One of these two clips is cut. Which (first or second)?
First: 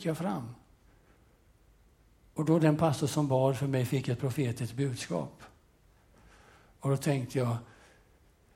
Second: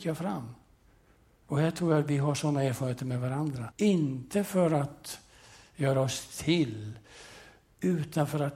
second